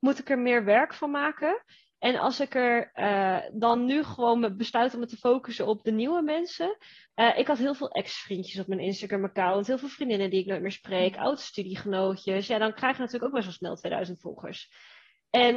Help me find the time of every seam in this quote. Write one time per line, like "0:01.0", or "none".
0:07.1